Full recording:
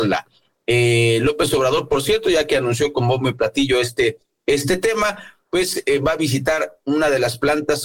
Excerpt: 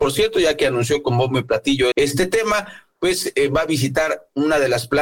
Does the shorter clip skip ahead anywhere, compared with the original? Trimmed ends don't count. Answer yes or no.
yes